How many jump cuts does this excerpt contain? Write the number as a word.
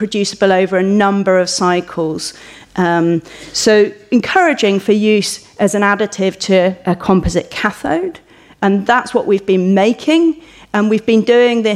zero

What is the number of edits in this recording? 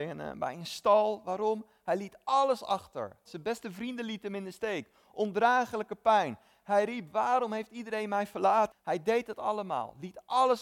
two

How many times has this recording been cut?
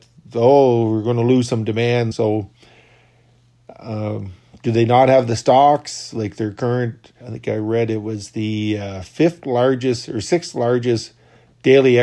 two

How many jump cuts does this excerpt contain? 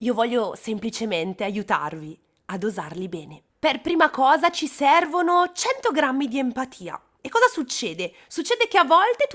two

